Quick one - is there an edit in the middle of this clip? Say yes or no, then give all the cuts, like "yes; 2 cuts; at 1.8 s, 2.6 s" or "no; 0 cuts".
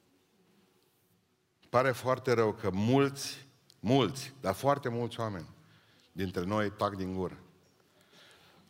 no; 0 cuts